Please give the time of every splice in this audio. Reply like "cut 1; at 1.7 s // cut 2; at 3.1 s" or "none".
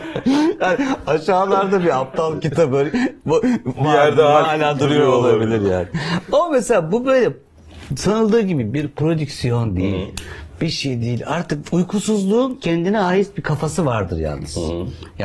cut 1; at 4.4 s